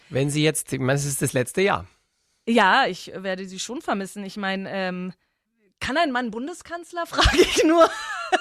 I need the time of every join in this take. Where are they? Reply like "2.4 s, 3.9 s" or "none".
none